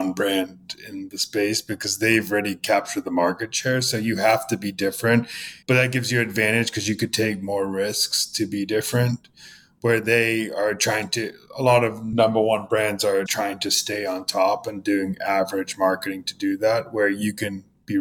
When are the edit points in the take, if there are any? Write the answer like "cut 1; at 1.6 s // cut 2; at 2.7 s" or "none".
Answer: cut 1; at 5.6 s // cut 2; at 13.3 s